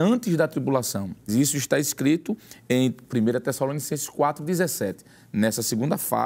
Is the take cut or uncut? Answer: cut